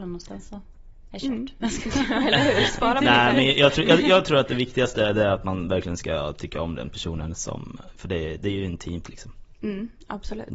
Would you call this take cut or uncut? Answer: uncut